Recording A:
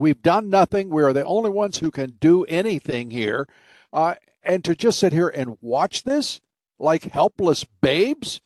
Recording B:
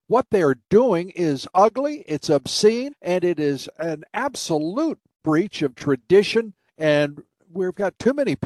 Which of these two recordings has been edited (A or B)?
B